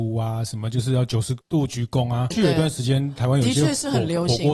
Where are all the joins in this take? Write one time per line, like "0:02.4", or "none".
0:02.3